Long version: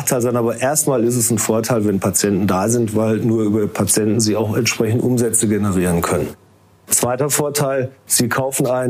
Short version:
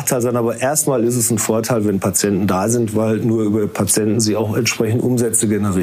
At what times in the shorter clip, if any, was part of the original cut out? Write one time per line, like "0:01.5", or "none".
none